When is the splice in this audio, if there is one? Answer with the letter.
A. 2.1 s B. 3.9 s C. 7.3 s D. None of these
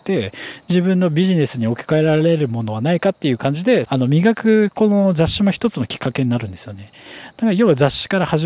B